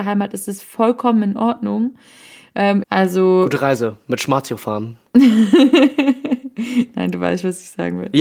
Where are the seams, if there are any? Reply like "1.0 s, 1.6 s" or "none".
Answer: 2.8 s